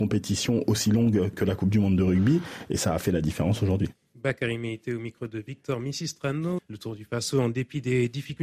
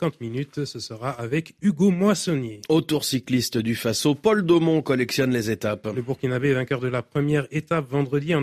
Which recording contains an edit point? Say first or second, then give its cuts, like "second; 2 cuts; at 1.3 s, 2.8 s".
first; 2 cuts; at 1.3 s, 6.6 s